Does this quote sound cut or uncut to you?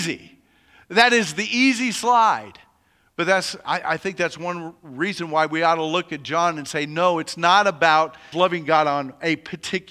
cut